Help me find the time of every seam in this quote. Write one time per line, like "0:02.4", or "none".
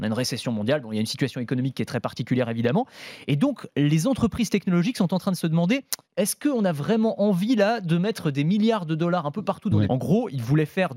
0:06.0
0:09.8